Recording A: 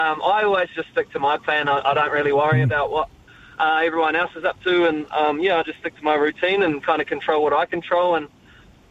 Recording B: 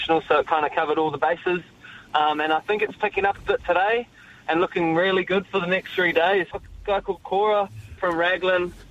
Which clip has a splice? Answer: B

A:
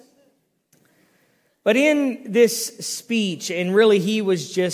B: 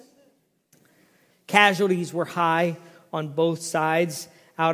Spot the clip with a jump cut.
B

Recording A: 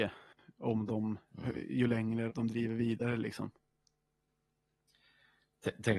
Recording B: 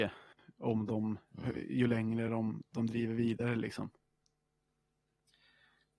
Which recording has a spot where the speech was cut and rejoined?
A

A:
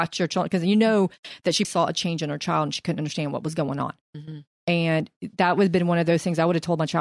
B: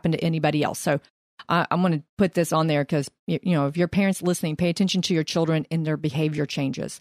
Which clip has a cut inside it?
A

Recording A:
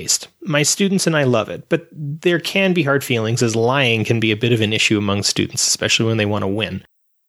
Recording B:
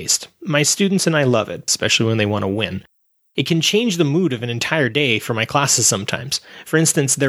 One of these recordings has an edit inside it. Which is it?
B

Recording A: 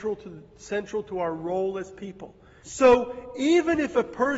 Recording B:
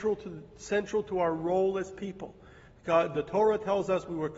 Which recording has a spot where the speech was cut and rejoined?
A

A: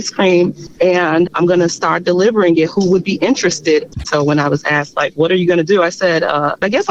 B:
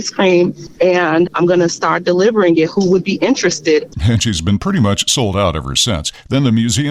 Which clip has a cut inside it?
A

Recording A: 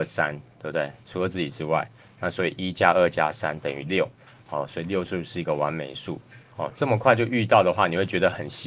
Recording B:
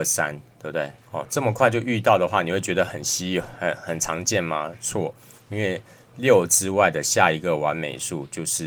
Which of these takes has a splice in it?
B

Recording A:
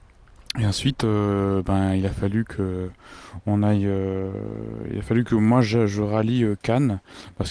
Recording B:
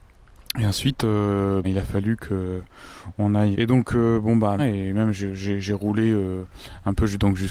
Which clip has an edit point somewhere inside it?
B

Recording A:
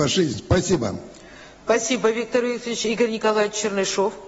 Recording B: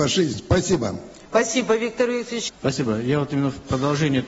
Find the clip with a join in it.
B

